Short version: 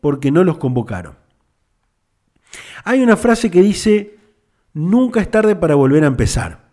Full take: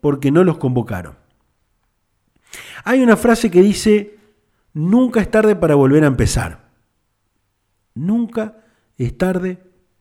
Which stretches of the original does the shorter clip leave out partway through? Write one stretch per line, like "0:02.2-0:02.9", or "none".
none